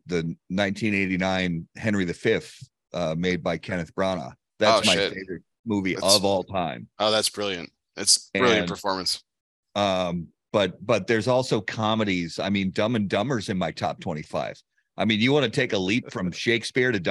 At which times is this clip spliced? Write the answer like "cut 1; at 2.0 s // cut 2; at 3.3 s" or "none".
none